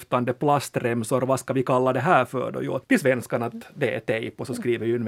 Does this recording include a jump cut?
yes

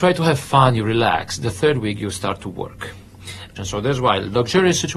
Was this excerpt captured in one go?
no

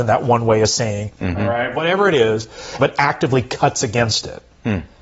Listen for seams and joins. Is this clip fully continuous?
no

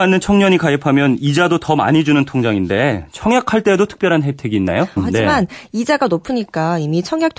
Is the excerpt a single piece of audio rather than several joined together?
no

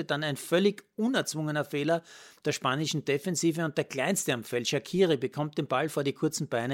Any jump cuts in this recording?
no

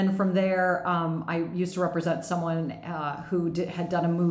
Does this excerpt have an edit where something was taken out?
no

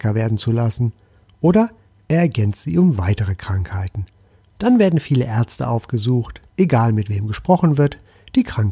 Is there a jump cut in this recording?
yes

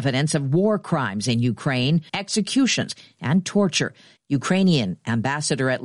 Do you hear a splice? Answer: yes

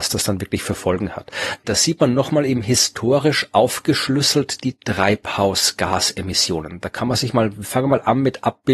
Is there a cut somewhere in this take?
yes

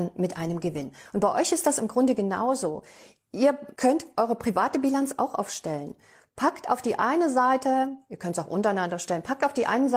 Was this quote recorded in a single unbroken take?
yes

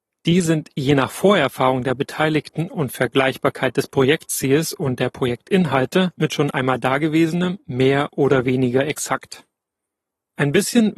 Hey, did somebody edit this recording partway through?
no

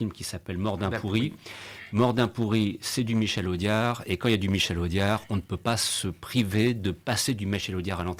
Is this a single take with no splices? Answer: yes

